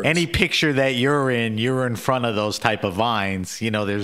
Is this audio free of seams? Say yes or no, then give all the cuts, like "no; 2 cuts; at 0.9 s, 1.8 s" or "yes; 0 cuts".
yes; 0 cuts